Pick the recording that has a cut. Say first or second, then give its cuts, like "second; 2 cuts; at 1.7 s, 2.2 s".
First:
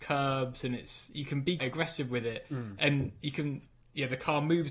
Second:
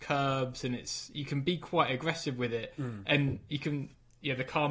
first; 1 cut; at 1.6 s